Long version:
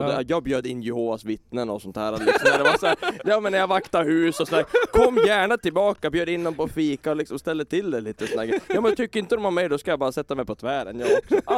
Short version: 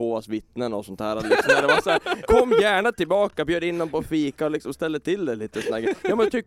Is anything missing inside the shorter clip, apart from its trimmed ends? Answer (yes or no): yes